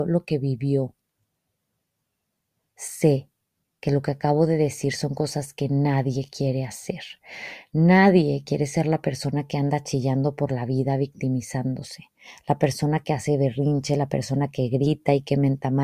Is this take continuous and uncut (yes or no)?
yes